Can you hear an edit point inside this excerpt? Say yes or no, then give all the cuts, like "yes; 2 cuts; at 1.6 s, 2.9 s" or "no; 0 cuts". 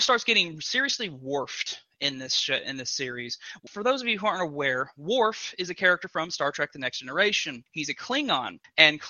no; 0 cuts